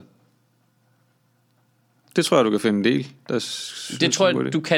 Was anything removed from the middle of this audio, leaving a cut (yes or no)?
no